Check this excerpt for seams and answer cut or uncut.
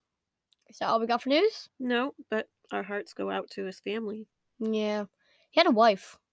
cut